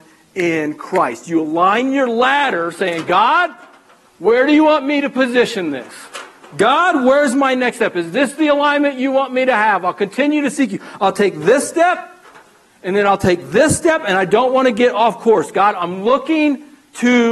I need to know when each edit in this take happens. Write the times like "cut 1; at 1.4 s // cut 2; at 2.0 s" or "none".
none